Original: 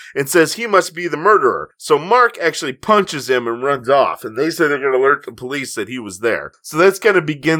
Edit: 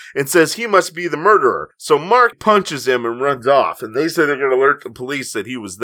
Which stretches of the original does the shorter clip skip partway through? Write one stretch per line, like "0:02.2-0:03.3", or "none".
0:02.3-0:02.7